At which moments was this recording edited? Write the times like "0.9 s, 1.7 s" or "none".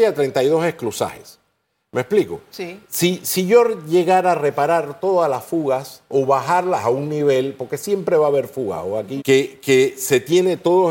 9.2 s